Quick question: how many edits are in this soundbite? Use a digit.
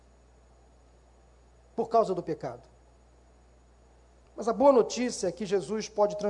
1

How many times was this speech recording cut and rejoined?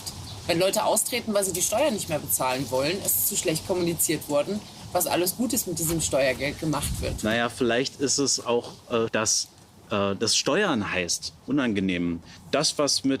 2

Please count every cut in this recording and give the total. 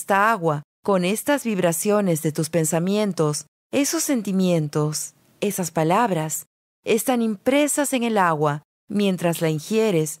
0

